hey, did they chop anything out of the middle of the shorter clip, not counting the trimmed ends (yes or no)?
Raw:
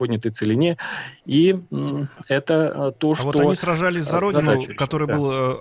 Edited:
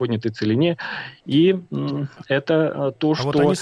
no